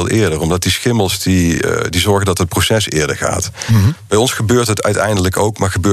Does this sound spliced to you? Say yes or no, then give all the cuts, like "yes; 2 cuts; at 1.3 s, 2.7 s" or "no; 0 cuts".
no; 0 cuts